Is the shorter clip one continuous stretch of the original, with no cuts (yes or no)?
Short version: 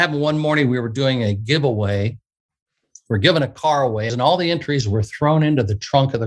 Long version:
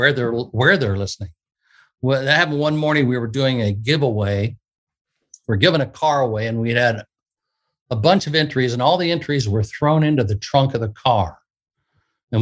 no